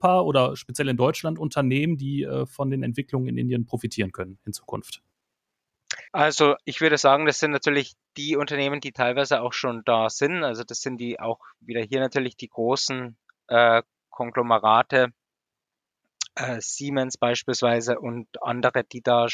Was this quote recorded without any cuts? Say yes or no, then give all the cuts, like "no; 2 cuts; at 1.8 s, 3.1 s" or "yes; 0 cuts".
no; 1 cut; at 6.1 s